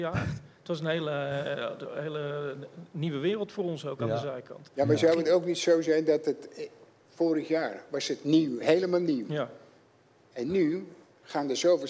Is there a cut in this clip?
no; 0 cuts

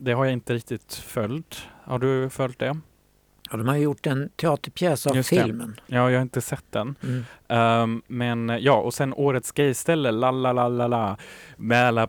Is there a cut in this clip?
no; 0 cuts

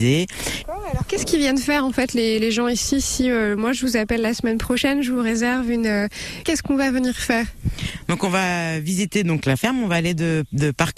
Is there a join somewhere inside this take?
yes; 1 cut; at 6.4 s

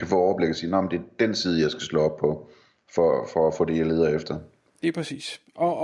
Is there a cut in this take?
no; 0 cuts

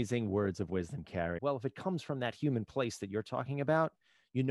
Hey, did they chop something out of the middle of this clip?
yes; 1 cut; at 1.4 s

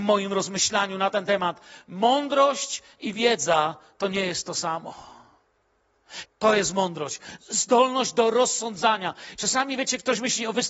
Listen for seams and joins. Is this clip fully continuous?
no; 2 cuts; at 6.2 s, 9.3 s

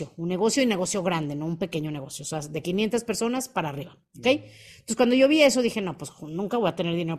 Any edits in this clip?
no; 0 cuts

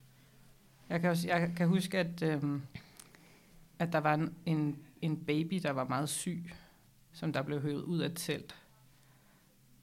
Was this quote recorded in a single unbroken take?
yes; 0 cuts

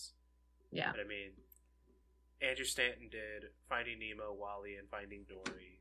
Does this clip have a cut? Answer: no; 0 cuts

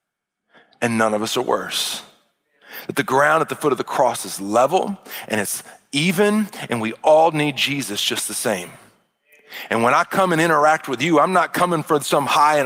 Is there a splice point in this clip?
no; 0 cuts

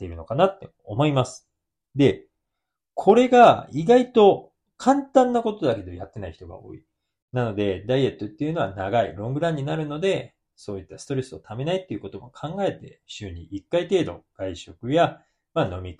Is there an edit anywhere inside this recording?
yes; 2 cuts; at 1.8 s, 7.2 s

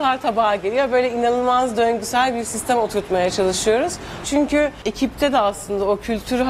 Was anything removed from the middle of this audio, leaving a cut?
yes; 1 cut; at 4.2 s

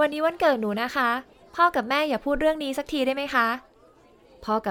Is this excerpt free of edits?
yes; 0 cuts

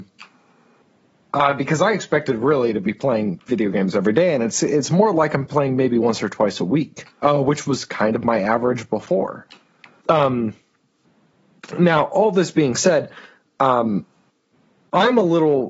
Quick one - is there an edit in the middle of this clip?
yes; 2 cuts; at 7.1 s, 10.0 s

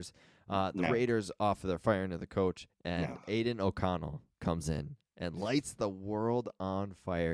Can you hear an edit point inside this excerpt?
yes; 1 cut; at 2.7 s

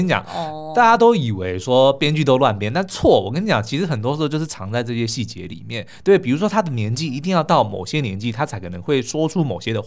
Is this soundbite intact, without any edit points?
yes; 0 cuts

